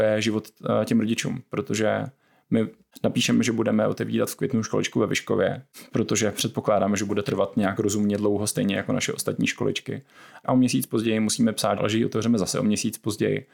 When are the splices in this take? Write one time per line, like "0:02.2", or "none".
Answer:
0:10.4
0:11.8